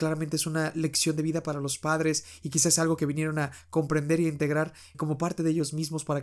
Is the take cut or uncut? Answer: cut